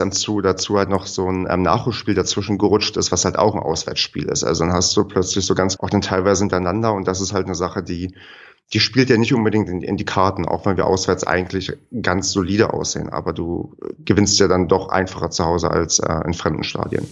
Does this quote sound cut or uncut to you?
cut